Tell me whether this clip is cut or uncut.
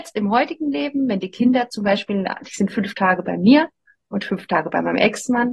uncut